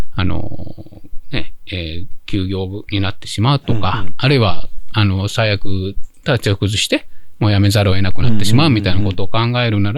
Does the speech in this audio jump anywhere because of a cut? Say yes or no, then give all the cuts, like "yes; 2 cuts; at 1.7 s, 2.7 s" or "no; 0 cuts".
no; 0 cuts